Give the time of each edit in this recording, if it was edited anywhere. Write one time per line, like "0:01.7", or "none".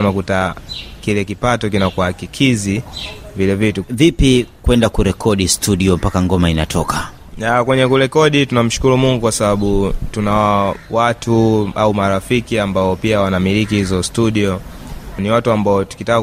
0:03.8
0:07.3
0:15.2